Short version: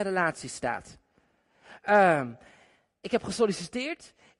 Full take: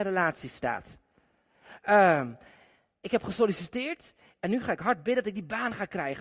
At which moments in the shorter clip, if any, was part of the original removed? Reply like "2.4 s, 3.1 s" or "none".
none